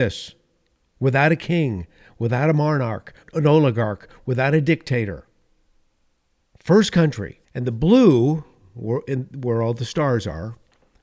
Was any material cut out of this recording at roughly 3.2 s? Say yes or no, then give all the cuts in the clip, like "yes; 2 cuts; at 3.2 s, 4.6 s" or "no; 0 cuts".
yes; 2 cuts; at 3.2 s, 7.4 s